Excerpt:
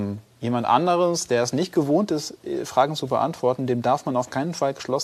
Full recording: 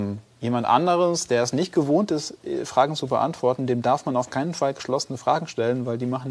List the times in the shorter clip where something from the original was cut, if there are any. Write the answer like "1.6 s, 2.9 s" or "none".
none